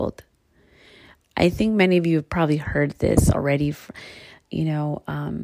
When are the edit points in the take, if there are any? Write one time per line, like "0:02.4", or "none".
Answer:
0:01.2